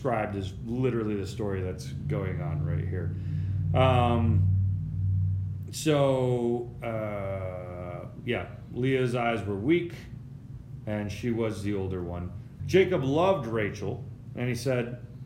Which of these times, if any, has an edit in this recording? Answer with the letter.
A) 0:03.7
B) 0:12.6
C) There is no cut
B